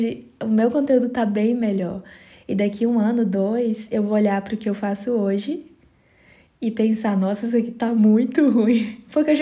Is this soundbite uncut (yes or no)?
yes